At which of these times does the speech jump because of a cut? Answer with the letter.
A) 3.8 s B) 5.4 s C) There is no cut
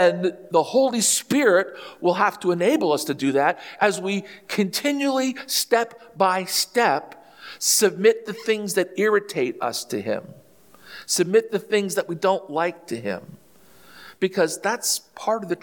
A